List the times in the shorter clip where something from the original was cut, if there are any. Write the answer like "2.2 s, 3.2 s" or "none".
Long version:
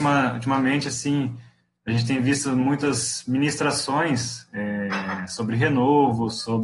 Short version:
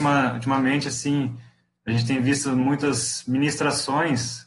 none